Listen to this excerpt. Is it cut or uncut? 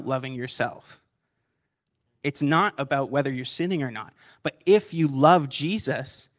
cut